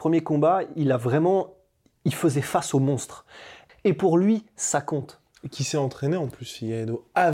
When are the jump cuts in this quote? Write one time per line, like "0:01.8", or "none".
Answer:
0:03.7